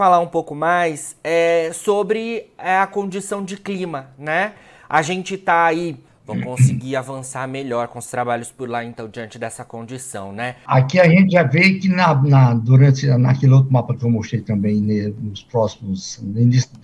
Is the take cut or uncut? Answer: cut